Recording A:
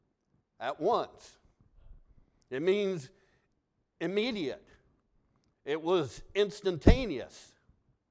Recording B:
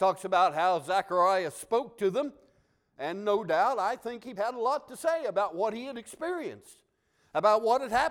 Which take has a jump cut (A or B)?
B